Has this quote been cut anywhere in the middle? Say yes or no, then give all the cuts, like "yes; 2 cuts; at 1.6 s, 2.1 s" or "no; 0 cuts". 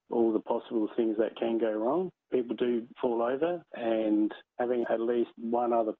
yes; 1 cut; at 3.7 s